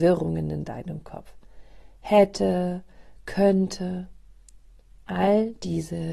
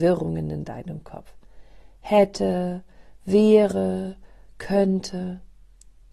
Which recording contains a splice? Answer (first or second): first